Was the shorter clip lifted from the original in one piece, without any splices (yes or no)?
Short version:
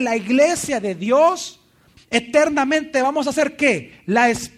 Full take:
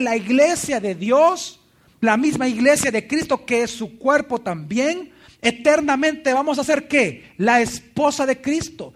no